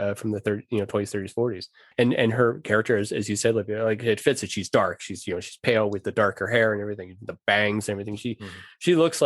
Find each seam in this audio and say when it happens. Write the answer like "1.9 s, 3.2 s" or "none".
none